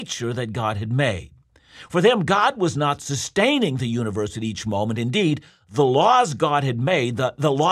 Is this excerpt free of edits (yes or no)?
yes